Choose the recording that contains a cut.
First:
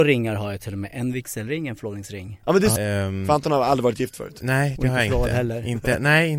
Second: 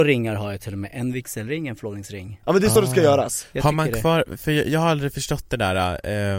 first; 1 cut; at 2.8 s

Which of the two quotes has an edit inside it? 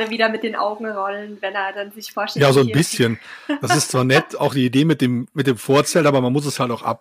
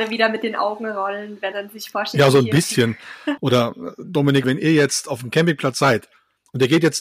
second; 3 cuts; at 1.5 s, 3.4 s, 4.4 s

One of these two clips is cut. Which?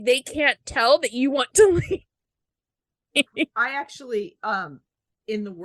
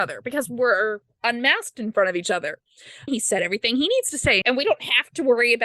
second; 2 cuts; at 3.1 s, 4.4 s

